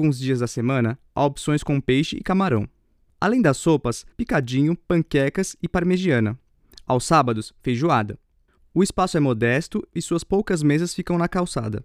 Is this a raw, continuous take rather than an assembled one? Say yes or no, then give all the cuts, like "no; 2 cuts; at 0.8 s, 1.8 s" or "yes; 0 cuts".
no; 2 cuts; at 4.1 s, 8.6 s